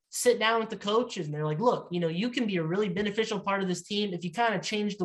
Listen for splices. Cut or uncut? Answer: uncut